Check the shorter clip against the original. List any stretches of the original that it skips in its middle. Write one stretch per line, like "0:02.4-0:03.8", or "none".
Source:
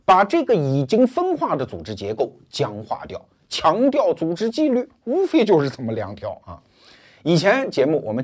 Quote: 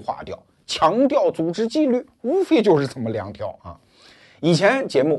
none